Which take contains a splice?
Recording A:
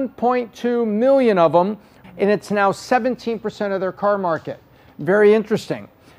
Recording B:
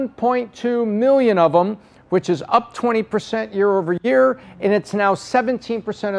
A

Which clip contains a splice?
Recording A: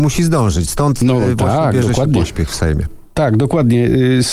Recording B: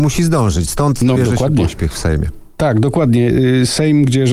B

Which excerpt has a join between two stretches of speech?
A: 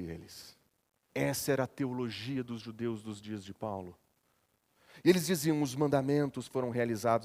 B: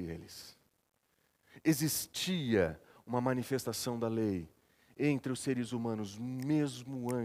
A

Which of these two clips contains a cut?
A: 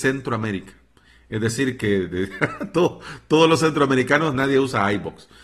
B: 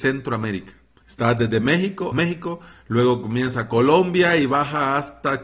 B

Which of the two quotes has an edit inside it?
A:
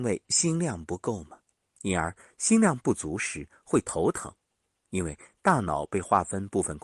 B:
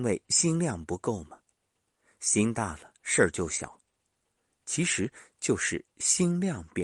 A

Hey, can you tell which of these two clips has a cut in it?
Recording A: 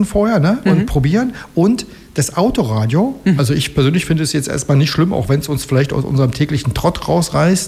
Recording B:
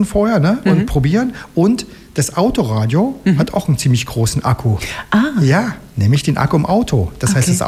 A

